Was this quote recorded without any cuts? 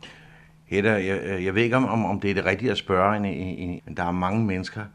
no; 1 cut; at 3.8 s

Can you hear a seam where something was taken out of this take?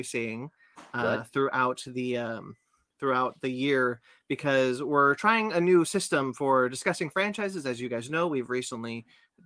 no; 0 cuts

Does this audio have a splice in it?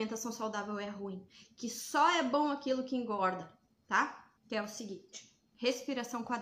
yes; 1 cut; at 4.3 s

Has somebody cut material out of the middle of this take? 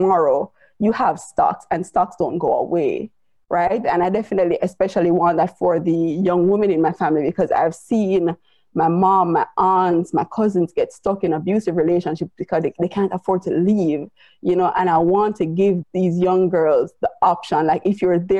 yes; 1 cut; at 3.8 s

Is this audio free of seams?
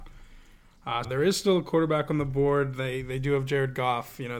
no; 1 cut; at 1.0 s

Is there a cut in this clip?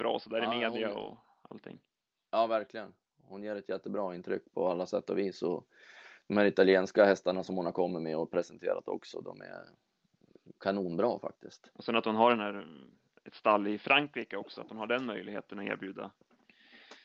no; 0 cuts

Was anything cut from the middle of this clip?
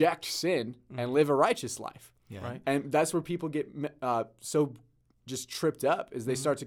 no; 0 cuts

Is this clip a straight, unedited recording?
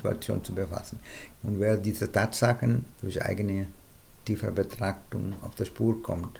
no; 2 cuts; at 1.3 s, 2.9 s

